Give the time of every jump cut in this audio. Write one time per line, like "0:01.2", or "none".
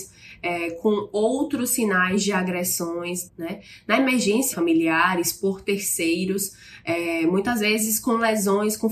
0:03.3
0:04.5